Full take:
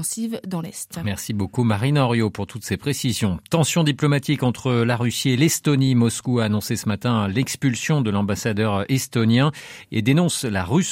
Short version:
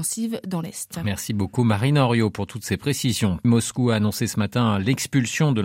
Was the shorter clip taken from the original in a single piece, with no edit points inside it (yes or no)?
no